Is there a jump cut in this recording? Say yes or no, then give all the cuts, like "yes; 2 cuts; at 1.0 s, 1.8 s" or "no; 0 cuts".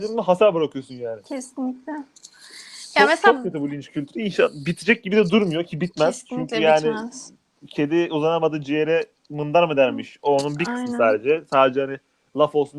no; 0 cuts